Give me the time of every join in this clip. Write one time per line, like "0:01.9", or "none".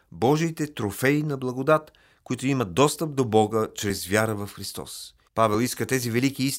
0:05.3